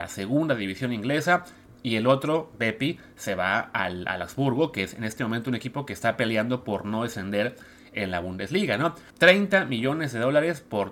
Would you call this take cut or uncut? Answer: cut